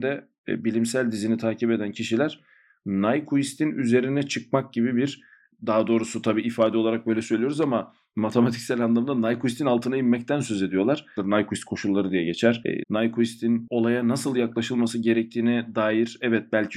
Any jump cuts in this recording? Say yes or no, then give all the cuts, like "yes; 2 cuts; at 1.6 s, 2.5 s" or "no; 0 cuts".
yes; 2 cuts; at 11.2 s, 12.8 s